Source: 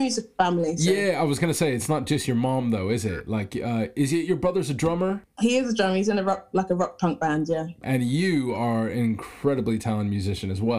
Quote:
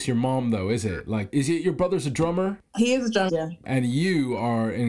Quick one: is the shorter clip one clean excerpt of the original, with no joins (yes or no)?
no